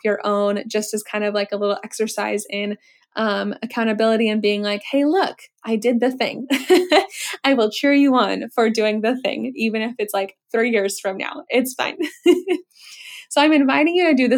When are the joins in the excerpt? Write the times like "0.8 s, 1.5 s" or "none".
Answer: none